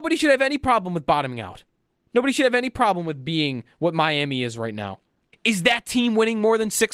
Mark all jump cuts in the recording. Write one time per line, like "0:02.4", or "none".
0:05.3